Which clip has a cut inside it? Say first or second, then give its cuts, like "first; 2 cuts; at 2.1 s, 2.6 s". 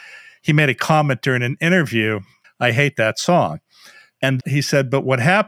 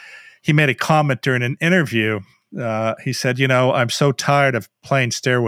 first; 2 cuts; at 2.4 s, 4.4 s